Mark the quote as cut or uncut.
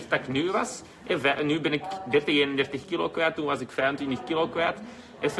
uncut